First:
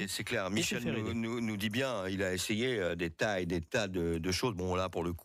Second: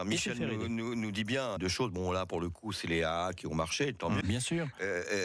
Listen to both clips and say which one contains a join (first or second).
second